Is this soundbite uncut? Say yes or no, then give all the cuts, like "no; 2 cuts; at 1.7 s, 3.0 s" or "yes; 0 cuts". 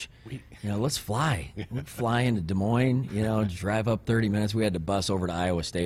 yes; 0 cuts